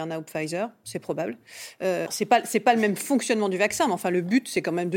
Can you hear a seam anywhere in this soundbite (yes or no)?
yes